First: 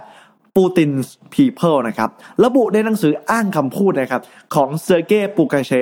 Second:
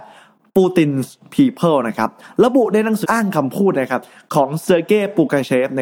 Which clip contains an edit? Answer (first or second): second